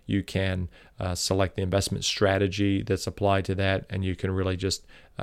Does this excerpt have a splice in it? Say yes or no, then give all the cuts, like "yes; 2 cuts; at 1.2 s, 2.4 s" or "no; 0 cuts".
no; 0 cuts